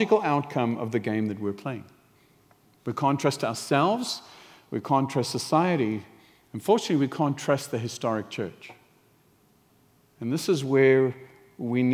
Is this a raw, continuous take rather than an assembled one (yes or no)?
yes